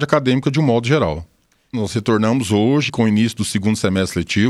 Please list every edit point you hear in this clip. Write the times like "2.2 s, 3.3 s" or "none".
1.7 s, 2.9 s